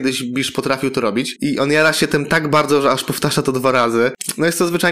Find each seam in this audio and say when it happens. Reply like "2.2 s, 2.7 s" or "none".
1.4 s

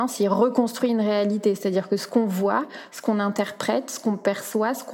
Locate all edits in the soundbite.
none

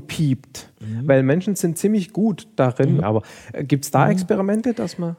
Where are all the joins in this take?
3.0 s

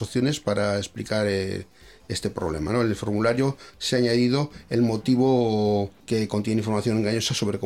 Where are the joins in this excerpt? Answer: 6.0 s

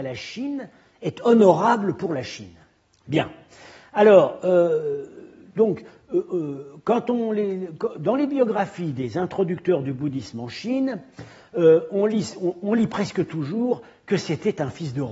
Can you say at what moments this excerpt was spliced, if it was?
none

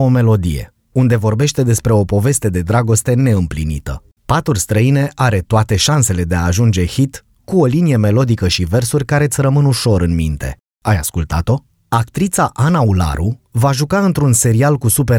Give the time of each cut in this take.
4.2 s

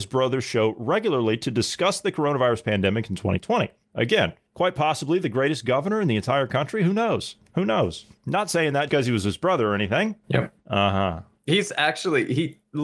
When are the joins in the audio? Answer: 8.9 s, 10.2 s

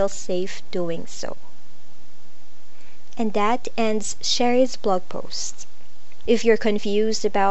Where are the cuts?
6.3 s

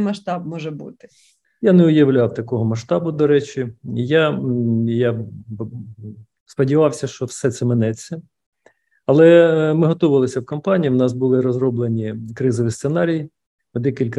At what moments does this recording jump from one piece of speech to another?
none

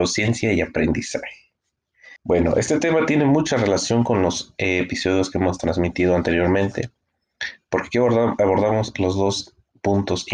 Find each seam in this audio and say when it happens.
2.2 s

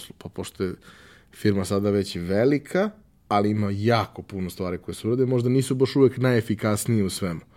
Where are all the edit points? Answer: none

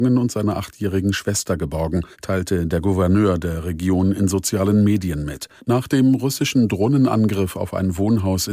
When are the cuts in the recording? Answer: 2.1 s, 5.6 s

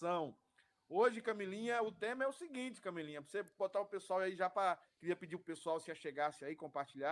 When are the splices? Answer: 4.8 s

